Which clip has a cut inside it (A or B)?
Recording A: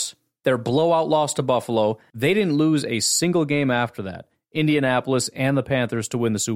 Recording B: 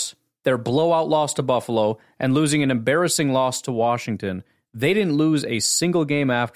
A